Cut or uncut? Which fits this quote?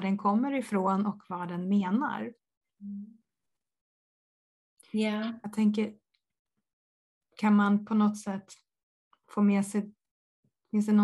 uncut